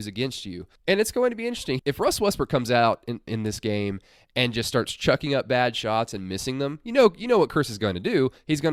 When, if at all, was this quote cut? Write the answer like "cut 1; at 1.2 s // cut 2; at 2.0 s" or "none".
cut 1; at 1.8 s // cut 2; at 3.3 s